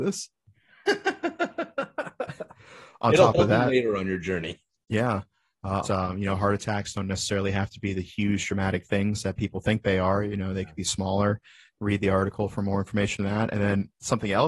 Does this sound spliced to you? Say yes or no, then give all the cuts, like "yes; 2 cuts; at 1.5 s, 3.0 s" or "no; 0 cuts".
yes; 1 cut; at 5.8 s